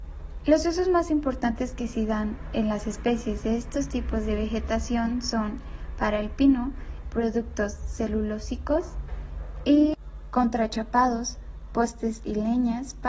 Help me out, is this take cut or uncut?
cut